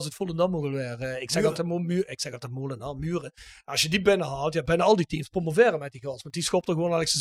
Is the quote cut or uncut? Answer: uncut